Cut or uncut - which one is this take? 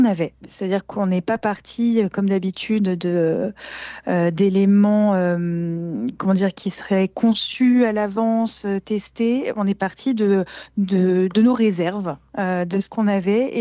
uncut